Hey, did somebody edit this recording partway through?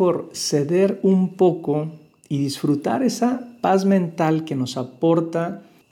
no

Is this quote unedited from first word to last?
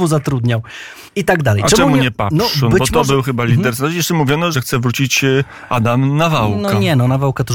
no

